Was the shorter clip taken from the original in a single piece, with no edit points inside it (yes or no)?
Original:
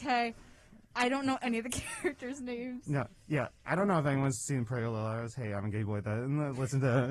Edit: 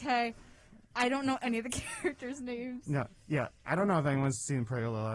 yes